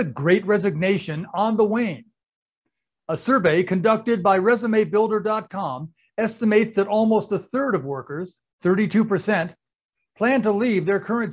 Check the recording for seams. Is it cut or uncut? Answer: uncut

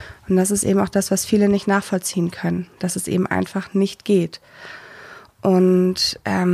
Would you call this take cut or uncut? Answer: uncut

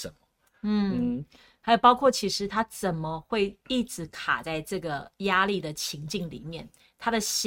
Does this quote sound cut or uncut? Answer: uncut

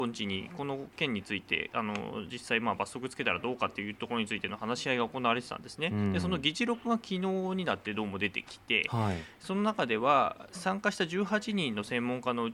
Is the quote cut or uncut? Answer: uncut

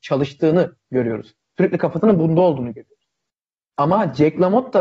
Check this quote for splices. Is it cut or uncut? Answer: uncut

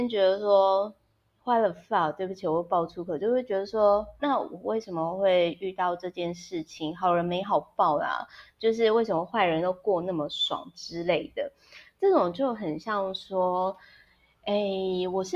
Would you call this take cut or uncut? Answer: cut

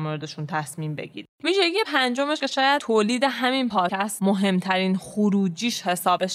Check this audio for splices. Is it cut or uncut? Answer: uncut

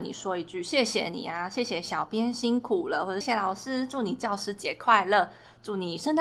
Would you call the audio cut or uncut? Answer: cut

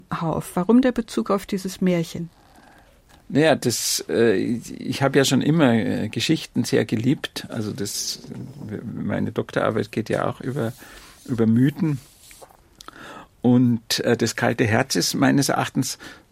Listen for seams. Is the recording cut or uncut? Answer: uncut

